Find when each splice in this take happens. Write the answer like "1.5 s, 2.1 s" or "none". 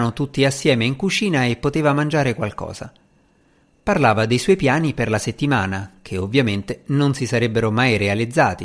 none